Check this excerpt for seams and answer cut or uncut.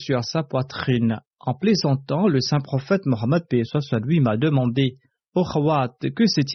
uncut